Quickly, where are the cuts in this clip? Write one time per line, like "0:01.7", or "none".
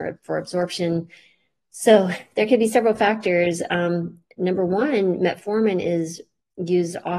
none